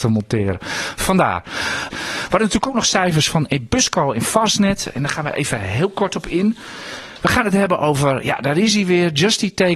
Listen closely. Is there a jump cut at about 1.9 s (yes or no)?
yes